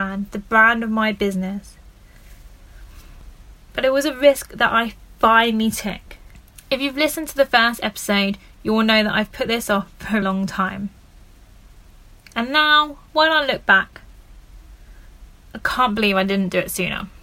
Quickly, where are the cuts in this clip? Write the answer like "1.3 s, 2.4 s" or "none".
10.2 s, 13.1 s